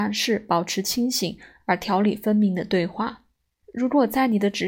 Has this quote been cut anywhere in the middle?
yes; 1 cut; at 3.6 s

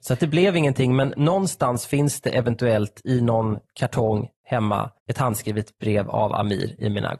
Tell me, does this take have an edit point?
yes; 1 cut; at 5.0 s

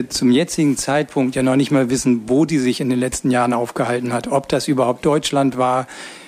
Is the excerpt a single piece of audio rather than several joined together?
yes; 0 cuts

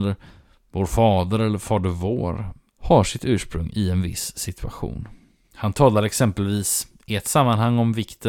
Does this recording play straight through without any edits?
no; 2 cuts; at 2.7 s, 5.4 s

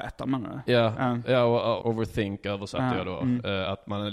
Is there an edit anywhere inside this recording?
yes; 1 cut; at 1.8 s

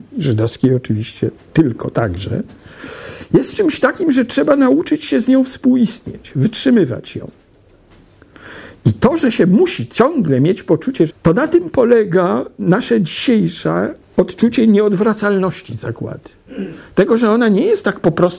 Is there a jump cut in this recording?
yes; 2 cuts; at 11.1 s, 14.0 s

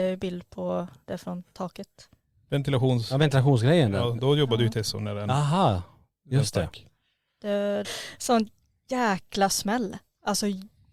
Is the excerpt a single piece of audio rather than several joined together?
no; 1 cut; at 7.8 s

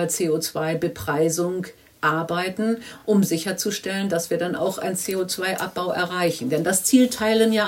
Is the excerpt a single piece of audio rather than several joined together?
yes; 0 cuts

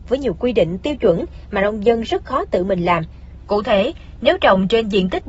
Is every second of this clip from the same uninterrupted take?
no; 1 cut; at 3.4 s

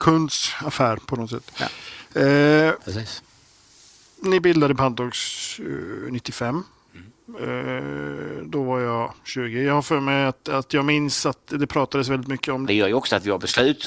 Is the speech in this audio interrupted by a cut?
yes; 1 cut; at 12.7 s

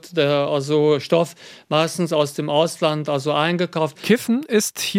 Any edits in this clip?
yes; 1 cut; at 3.9 s

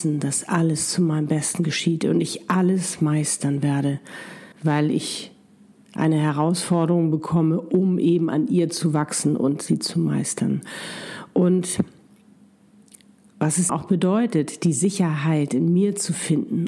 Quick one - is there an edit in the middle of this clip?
yes; 2 cuts; at 4.5 s, 13.7 s

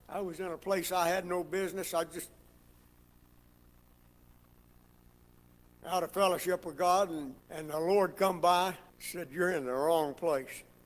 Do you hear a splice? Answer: yes; 2 cuts; at 7.4 s, 8.9 s

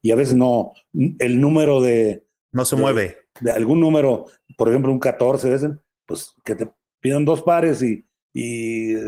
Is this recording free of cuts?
yes; 0 cuts

